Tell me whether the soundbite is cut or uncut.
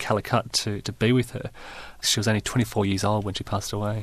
cut